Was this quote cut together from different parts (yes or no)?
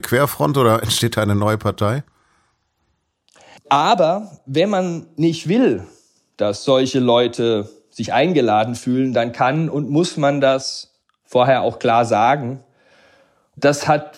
yes